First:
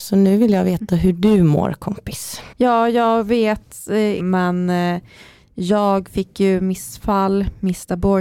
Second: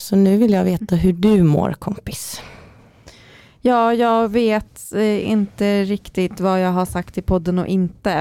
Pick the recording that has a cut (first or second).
first